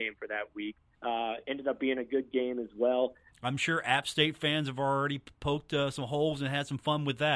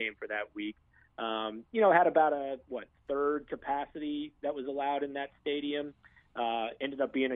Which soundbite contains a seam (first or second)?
first